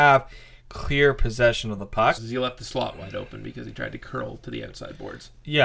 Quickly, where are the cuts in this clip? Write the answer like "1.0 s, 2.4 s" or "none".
2.2 s